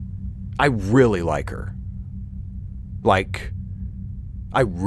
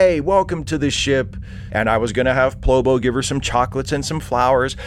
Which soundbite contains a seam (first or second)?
second